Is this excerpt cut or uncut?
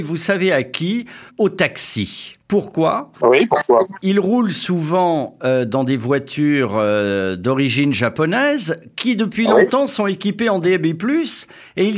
uncut